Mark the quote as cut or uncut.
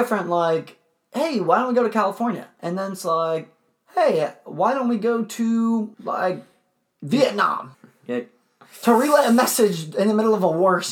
cut